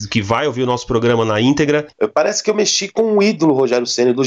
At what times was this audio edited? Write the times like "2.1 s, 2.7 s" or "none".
1.9 s